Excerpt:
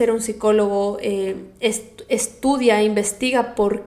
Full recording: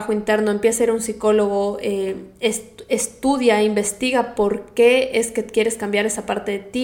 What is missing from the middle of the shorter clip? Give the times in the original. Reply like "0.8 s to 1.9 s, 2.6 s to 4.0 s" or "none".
none